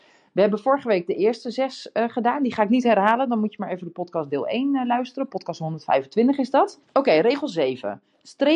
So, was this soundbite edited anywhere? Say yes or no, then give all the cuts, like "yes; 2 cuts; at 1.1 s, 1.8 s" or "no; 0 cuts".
yes; 1 cut; at 6.8 s